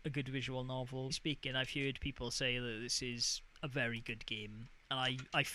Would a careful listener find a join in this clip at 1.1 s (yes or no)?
yes